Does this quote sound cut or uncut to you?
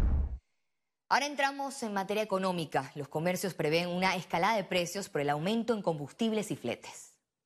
uncut